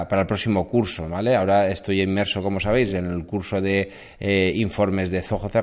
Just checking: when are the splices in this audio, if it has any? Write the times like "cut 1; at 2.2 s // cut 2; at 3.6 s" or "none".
none